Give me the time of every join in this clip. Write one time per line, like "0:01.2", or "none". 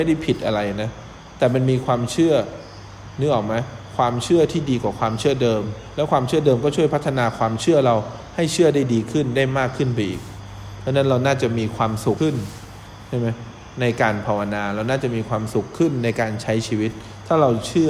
0:12.2